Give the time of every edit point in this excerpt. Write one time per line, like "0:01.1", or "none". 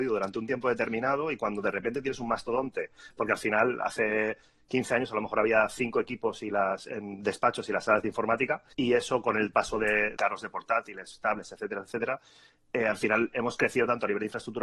0:08.7
0:10.2